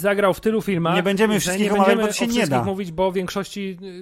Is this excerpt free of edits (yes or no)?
yes